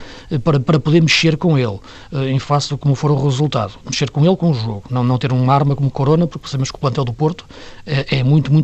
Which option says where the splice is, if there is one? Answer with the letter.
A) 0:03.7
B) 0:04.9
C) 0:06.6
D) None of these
D